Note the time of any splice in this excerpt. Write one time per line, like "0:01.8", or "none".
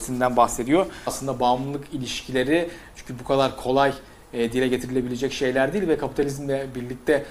0:01.1